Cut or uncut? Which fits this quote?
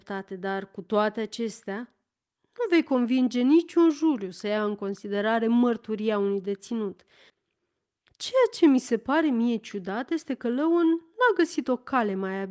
uncut